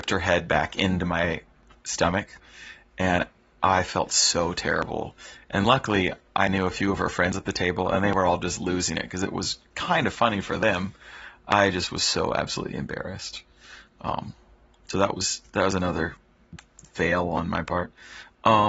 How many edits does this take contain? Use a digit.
0